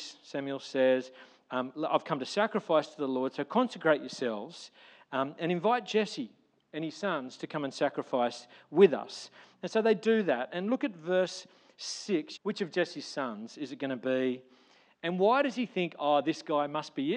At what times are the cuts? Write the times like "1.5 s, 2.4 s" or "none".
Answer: 12.4 s, 14.9 s